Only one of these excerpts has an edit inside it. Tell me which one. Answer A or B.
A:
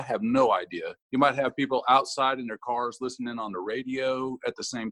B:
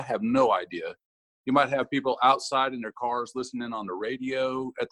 A